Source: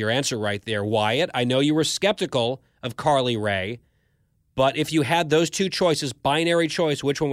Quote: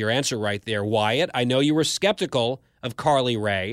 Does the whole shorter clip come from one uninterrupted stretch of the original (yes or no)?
yes